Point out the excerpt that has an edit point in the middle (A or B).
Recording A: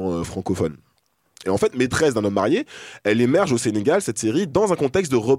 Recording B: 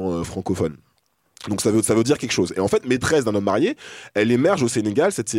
A